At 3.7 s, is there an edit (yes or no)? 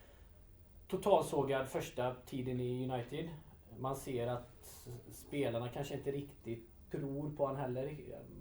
no